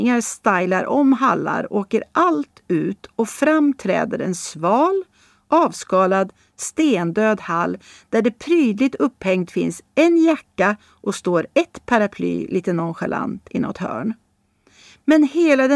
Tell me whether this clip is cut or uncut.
uncut